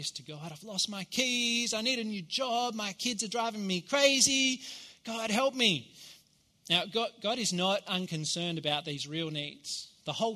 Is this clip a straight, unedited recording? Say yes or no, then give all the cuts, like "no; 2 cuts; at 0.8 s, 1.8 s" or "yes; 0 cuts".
yes; 0 cuts